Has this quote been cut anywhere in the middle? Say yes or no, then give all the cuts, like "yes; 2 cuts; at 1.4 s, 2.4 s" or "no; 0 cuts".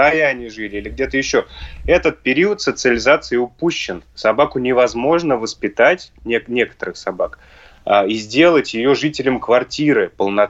no; 0 cuts